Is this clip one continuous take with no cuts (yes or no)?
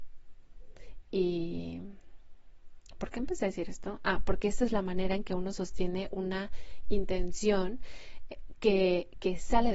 yes